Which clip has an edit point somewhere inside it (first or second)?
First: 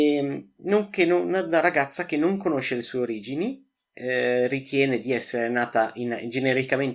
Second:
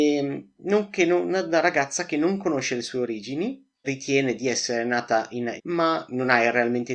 second